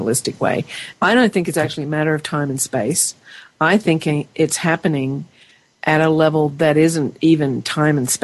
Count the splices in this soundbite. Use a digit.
1